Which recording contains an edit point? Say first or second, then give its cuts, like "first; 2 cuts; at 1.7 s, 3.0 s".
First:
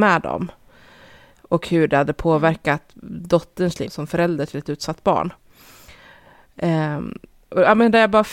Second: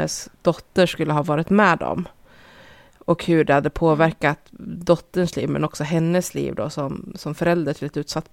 first; 1 cut; at 3.8 s